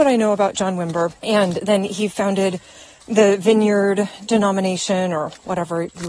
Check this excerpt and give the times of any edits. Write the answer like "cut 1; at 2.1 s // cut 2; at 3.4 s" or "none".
cut 1; at 1.2 s